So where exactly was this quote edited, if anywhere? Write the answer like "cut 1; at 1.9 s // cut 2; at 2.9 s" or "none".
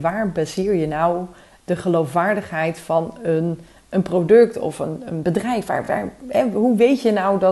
none

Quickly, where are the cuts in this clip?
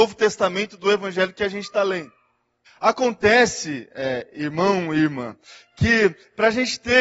cut 1; at 2.7 s

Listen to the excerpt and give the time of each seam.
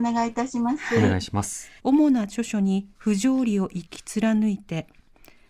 cut 1; at 1.8 s // cut 2; at 2.9 s

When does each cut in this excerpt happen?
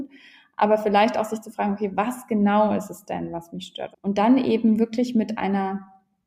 cut 1; at 3.9 s

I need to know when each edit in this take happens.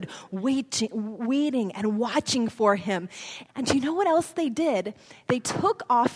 cut 1; at 3.5 s

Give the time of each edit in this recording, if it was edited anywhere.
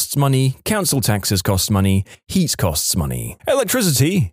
cut 1; at 3.4 s

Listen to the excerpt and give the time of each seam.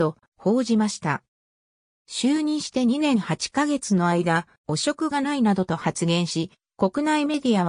cut 1; at 1.9 s

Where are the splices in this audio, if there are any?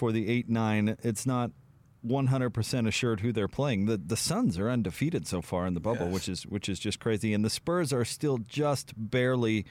none

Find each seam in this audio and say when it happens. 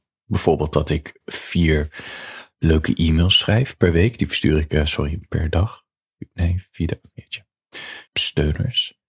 cut 1; at 8.1 s

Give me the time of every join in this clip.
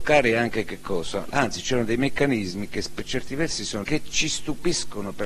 cut 1; at 1.3 s // cut 2; at 3.8 s

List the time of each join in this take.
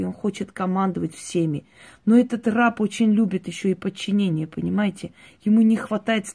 none

